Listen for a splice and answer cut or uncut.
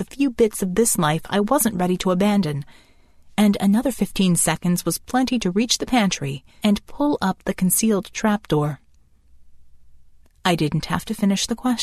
cut